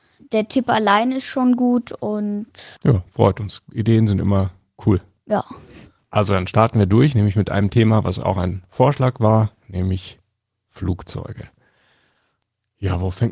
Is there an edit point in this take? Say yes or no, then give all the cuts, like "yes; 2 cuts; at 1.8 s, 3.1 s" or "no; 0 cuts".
yes; 1 cut; at 2.8 s